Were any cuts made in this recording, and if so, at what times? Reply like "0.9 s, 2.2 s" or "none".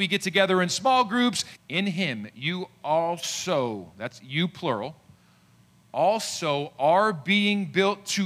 1.5 s